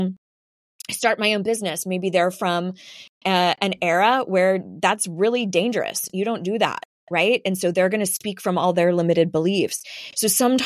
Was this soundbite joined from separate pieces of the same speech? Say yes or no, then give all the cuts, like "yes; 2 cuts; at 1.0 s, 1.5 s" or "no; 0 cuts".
no; 0 cuts